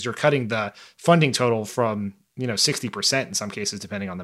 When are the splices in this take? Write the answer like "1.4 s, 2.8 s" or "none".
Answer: none